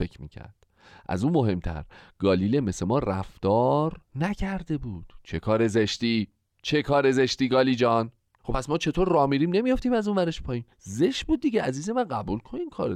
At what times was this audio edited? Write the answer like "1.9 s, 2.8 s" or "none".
8.4 s, 10.7 s